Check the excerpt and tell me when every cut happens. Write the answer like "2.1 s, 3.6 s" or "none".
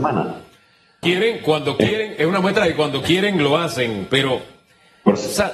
1.0 s